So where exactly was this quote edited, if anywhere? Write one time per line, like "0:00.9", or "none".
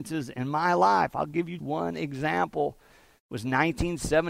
0:01.6